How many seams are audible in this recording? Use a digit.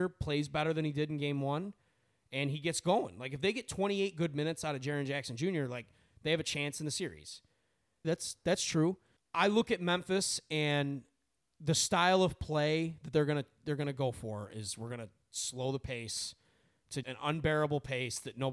2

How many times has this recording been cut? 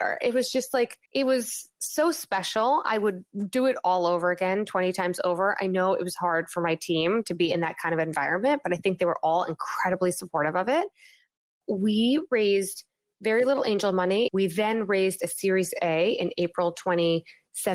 2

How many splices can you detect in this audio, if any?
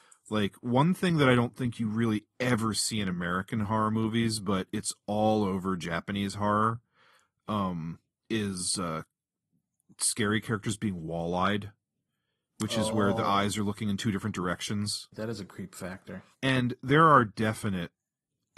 2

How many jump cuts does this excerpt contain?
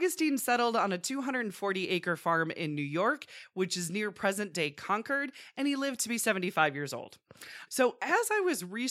1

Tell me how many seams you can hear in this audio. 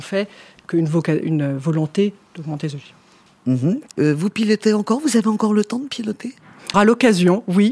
2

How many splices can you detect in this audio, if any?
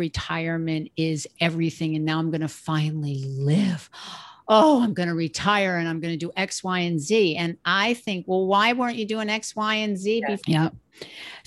1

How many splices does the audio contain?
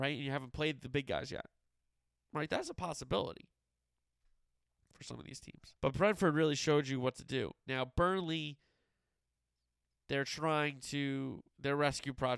1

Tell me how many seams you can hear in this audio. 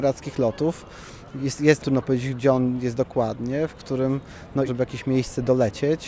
2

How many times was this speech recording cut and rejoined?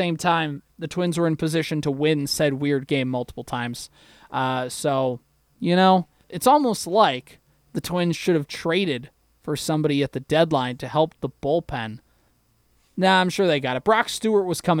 1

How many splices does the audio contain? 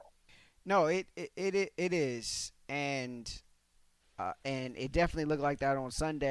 1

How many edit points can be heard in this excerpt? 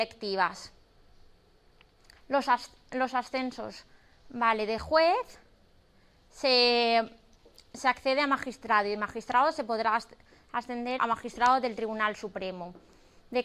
2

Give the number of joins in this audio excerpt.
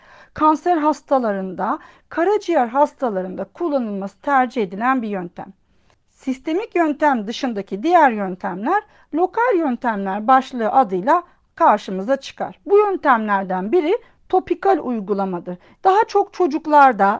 2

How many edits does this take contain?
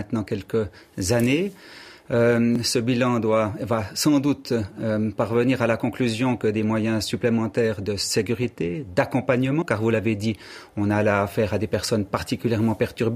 1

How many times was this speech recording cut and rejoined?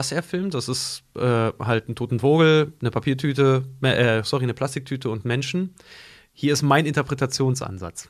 0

